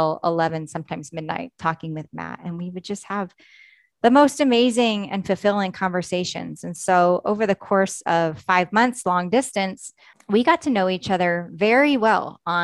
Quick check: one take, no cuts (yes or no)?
no